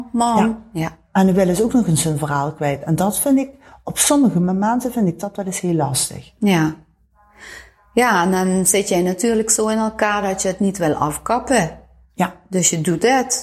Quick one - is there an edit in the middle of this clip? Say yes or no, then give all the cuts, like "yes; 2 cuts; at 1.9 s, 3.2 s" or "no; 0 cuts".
no; 0 cuts